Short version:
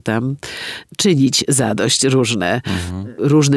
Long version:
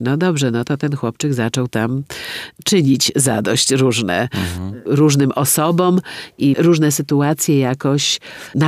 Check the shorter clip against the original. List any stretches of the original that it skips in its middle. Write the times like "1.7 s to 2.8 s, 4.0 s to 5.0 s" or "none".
none